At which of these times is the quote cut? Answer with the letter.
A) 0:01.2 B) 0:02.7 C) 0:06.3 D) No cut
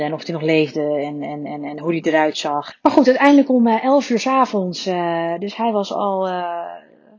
B